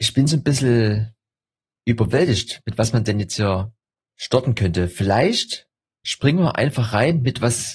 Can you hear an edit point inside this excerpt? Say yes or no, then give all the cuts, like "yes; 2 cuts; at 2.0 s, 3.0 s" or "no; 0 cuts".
no; 0 cuts